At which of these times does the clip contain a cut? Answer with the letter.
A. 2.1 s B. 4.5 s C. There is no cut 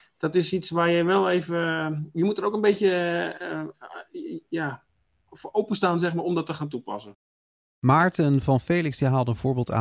C